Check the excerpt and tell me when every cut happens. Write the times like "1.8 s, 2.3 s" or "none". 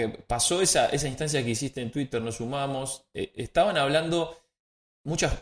none